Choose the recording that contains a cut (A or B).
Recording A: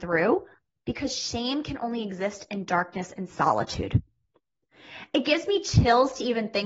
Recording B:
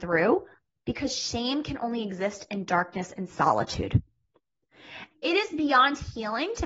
B